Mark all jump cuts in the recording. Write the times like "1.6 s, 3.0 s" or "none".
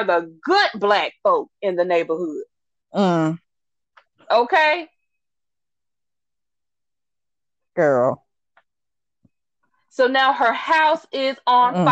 none

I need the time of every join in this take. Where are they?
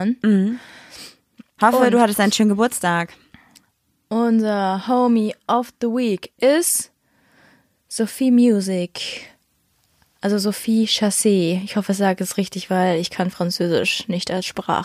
none

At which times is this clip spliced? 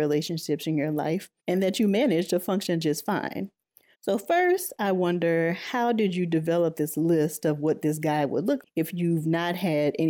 1.4 s, 3.9 s, 8.6 s

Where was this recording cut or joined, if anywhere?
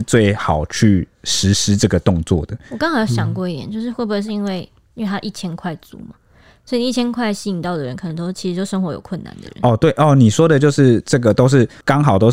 none

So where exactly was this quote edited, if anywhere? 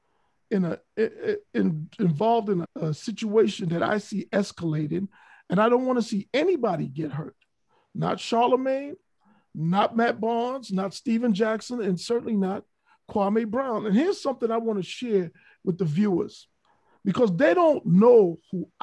2.6 s

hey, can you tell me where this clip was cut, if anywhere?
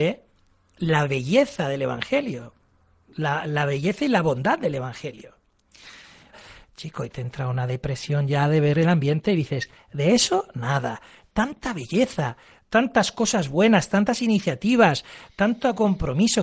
6.3 s

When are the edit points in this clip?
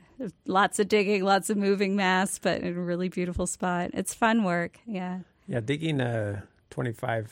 none

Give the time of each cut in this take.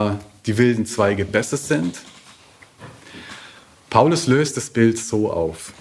none

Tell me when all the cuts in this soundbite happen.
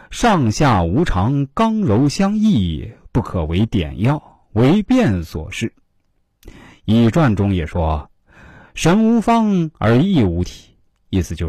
none

